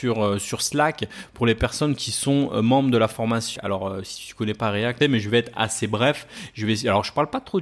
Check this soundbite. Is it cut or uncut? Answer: cut